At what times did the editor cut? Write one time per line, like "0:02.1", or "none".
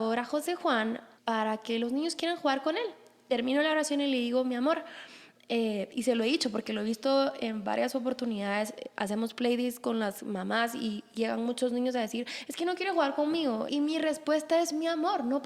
0:01.2
0:13.7